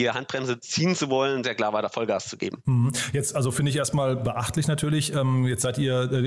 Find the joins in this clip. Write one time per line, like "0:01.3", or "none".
0:01.4